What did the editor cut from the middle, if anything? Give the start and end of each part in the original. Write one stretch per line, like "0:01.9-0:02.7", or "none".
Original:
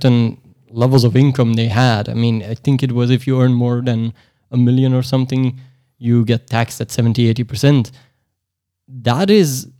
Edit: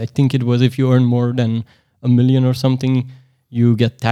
none